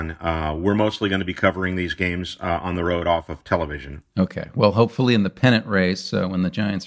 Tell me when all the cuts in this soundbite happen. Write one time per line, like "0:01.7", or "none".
none